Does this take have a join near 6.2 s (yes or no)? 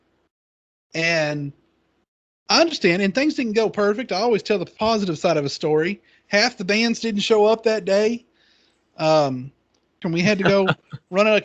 no